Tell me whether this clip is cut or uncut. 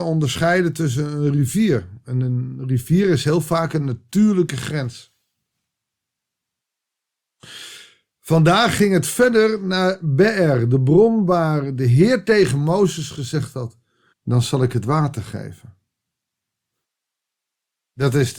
cut